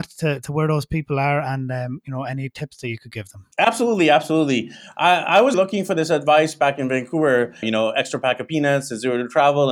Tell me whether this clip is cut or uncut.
cut